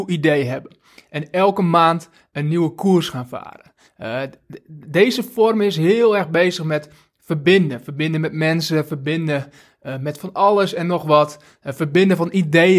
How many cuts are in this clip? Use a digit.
1